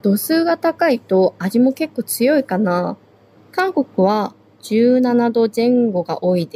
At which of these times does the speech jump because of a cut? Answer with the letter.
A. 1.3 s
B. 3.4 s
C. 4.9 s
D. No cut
B